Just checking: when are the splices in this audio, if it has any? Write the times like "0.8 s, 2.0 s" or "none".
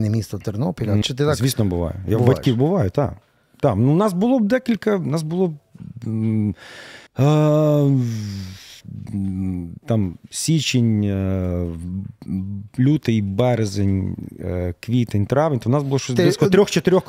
1.0 s, 7.1 s, 9.8 s